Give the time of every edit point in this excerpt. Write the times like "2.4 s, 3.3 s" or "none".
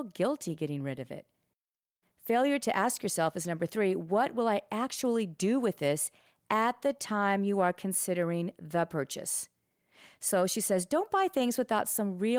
none